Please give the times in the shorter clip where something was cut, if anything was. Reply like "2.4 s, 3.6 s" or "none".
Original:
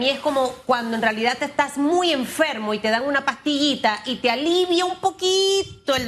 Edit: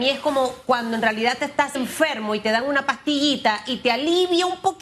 1.7 s